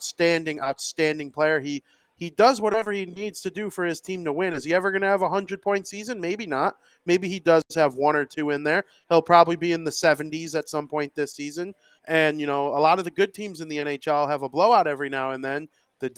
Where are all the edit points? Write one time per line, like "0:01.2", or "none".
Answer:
0:12.0

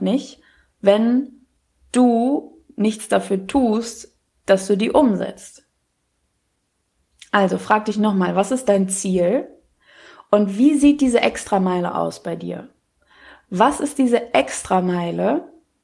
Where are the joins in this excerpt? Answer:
none

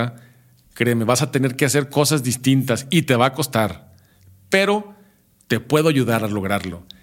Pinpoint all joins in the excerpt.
none

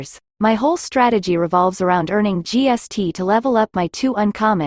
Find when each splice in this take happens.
none

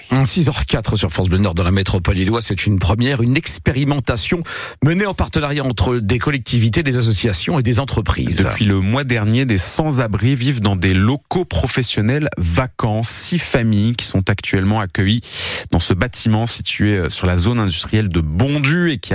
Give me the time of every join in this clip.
none

